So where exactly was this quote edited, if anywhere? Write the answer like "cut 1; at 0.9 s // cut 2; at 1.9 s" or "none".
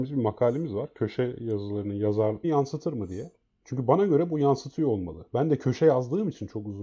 cut 1; at 2.4 s